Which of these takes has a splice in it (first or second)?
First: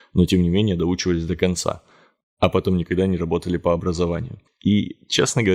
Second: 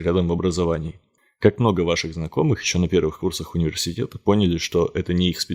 first